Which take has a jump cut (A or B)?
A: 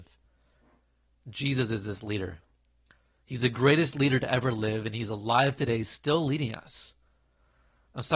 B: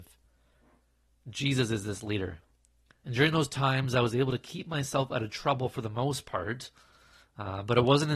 B